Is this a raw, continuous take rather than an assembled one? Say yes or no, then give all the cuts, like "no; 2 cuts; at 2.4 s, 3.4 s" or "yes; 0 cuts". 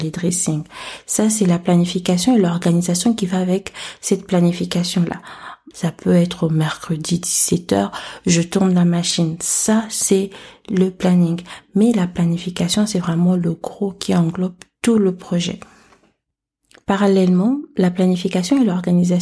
no; 1 cut; at 5.7 s